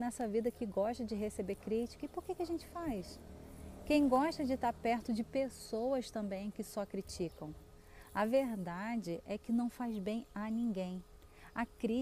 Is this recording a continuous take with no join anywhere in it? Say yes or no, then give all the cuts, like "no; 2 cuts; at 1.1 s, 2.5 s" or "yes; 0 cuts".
yes; 0 cuts